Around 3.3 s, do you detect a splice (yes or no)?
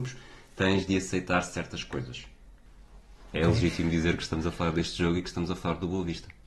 yes